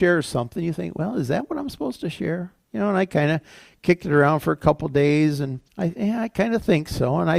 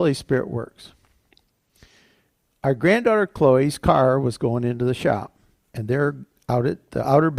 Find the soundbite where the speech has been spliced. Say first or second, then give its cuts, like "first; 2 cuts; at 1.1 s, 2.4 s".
first; 2 cuts; at 2.6 s, 5.7 s